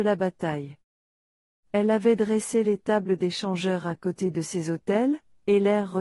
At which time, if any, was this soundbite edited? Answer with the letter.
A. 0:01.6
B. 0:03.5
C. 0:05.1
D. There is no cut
A